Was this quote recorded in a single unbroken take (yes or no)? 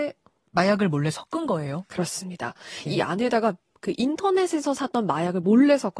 no